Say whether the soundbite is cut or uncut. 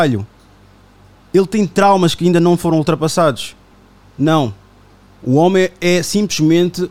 uncut